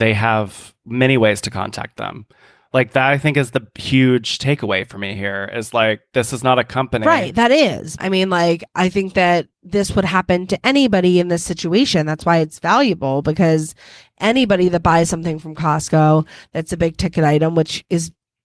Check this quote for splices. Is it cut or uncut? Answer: cut